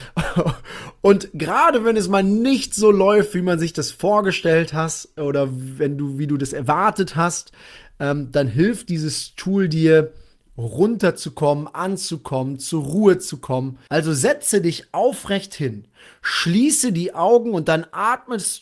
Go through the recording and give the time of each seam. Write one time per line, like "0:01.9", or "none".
0:13.9